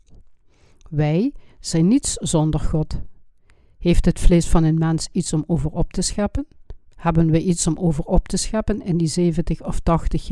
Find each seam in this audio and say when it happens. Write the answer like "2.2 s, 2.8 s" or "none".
1.5 s, 6.9 s